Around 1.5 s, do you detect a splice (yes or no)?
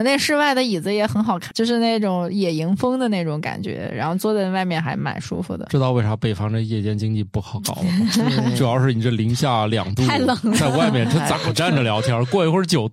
yes